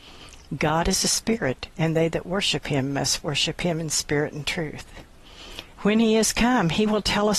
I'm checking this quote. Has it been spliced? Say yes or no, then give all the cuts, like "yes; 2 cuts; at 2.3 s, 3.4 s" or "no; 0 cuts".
yes; 1 cut; at 5.7 s